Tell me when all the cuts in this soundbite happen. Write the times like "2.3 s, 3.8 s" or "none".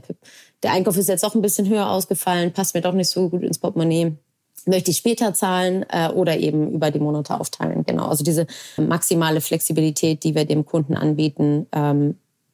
8.8 s